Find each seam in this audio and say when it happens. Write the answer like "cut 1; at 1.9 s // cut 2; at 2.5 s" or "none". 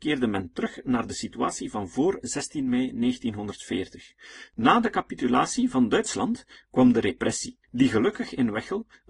cut 1; at 4.5 s // cut 2; at 7.6 s